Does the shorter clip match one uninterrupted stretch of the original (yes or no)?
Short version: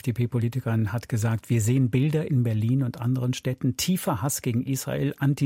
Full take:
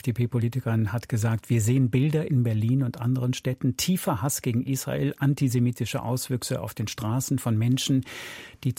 yes